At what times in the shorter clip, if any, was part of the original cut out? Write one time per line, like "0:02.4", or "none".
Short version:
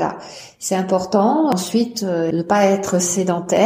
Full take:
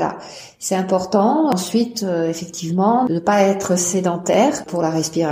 0:02.3